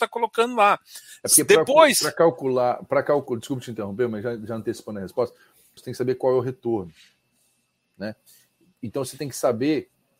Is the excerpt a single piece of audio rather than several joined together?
no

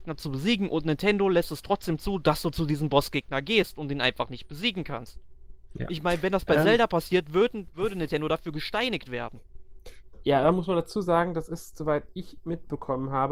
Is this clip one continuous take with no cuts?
yes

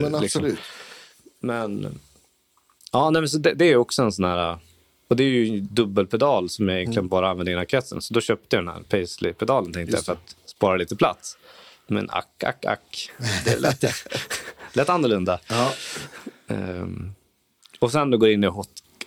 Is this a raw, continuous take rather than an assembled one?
yes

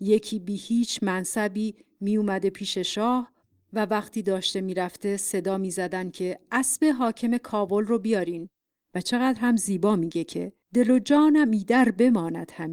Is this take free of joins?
no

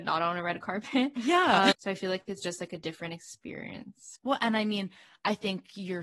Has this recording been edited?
yes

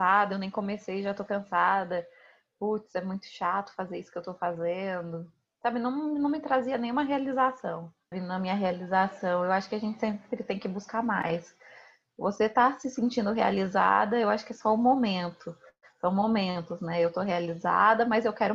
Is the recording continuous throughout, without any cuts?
no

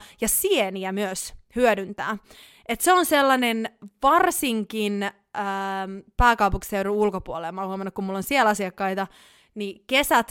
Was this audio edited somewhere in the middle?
no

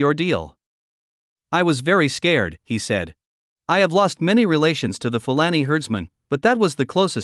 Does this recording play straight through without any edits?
no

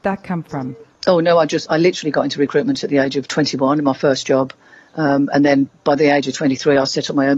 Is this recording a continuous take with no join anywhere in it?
yes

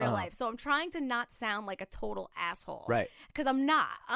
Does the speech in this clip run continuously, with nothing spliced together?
yes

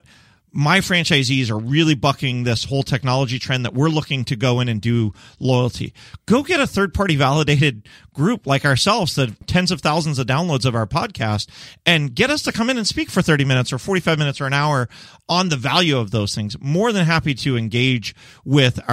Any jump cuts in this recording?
yes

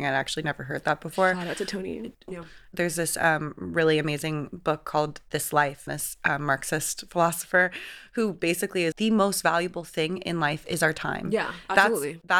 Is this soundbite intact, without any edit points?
no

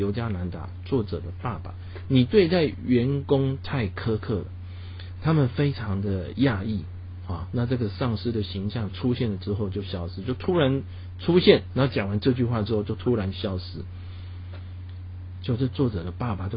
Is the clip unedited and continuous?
yes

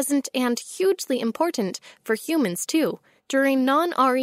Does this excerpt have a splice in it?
yes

